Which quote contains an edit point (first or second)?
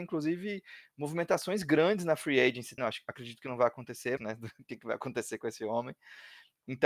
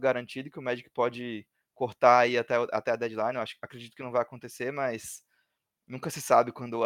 first